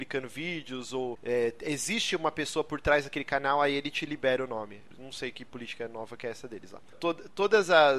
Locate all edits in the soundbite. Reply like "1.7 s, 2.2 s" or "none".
4.9 s, 6.9 s